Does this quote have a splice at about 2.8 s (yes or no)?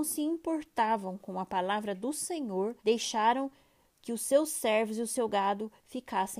yes